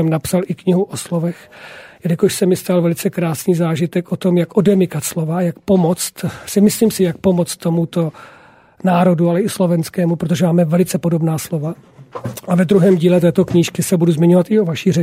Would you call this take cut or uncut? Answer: uncut